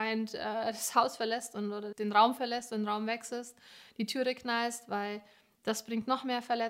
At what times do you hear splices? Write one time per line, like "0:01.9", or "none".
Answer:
0:01.9